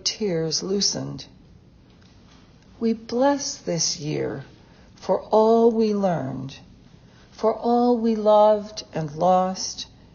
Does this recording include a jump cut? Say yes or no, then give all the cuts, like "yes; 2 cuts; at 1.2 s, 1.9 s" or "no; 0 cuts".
no; 0 cuts